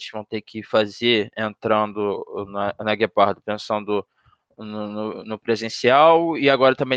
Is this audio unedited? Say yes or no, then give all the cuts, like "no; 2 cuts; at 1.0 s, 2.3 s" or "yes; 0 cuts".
yes; 0 cuts